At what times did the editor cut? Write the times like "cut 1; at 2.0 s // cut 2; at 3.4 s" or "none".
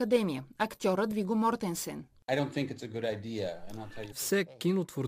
cut 1; at 4.1 s

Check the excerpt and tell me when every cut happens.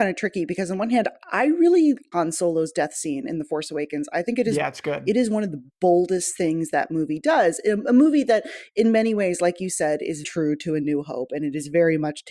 cut 1; at 2.1 s // cut 2; at 10.2 s

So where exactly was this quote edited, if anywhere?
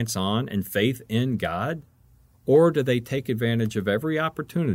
cut 1; at 2.3 s

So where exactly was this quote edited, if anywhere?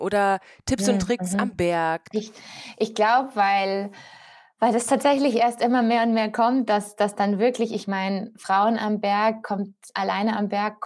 cut 1; at 2.1 s

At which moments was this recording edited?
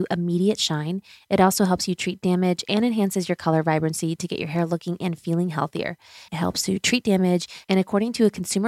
cut 1; at 6.3 s // cut 2; at 7.6 s

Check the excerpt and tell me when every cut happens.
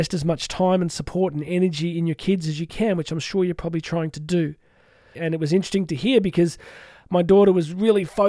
cut 1; at 5.1 s

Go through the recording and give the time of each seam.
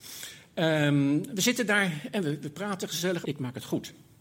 cut 1; at 3.2 s

